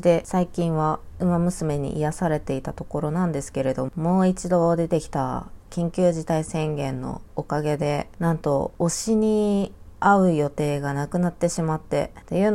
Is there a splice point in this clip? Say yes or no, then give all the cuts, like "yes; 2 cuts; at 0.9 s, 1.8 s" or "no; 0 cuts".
yes; 1 cut; at 3.9 s